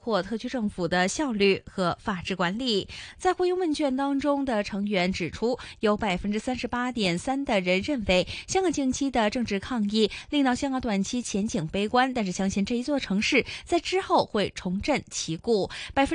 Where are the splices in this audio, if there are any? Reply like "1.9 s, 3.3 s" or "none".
3.1 s